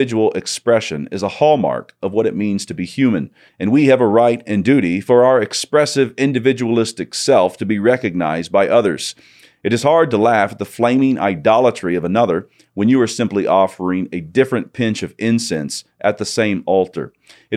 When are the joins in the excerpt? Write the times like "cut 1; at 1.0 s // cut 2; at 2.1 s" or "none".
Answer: cut 1; at 3.5 s